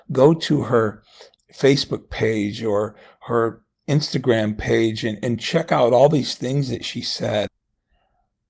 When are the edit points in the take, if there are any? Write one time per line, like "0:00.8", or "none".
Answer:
0:07.5